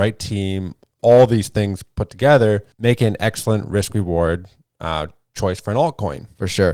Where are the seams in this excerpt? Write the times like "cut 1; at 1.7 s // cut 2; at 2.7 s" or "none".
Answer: cut 1; at 1.0 s // cut 2; at 2.7 s